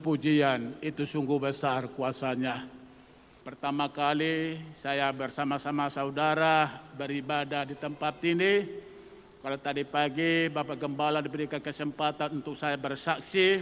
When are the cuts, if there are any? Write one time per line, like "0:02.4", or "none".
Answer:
0:03.4

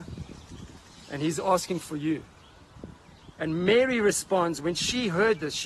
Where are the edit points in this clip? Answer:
none

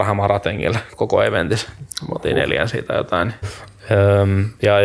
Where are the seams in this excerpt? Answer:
0:00.9
0:03.4

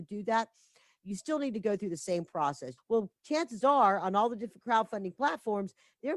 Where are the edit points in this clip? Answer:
0:02.8

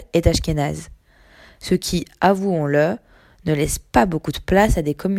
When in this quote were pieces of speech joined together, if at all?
none

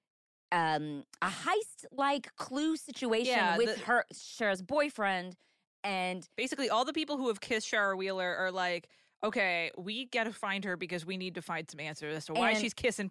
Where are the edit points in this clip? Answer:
none

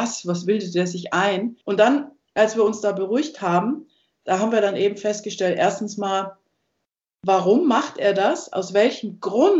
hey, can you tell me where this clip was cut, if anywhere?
0:01.6

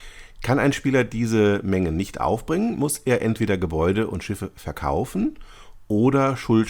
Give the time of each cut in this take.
none

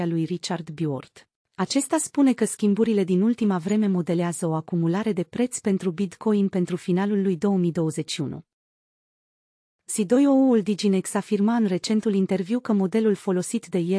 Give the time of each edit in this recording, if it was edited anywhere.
none

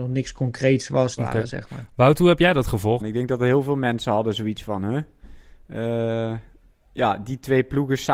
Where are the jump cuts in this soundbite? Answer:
0:01.2
0:03.0

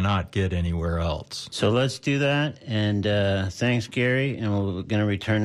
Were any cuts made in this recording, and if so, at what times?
none

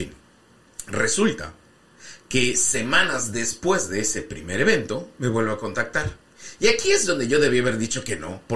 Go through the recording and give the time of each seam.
none

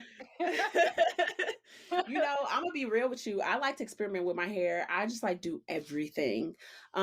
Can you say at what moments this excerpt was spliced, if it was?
none

